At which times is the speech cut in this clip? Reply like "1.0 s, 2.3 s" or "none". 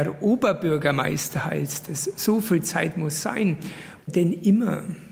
4.0 s